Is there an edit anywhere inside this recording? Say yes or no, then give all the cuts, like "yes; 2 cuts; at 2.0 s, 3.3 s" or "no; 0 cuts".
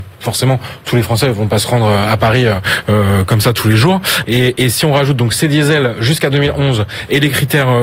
yes; 1 cut; at 4.2 s